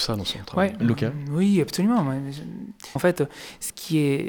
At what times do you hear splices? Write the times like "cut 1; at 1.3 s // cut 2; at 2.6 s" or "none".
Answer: cut 1; at 3.0 s